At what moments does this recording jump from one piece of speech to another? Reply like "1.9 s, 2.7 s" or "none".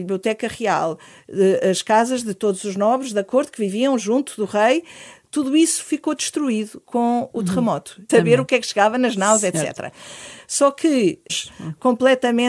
8.1 s, 11.3 s